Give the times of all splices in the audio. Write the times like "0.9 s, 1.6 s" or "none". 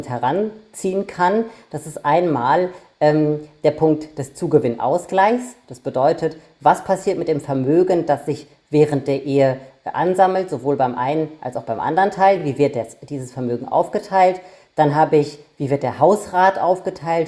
none